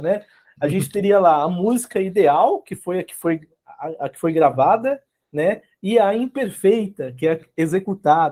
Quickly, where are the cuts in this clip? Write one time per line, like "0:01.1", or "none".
none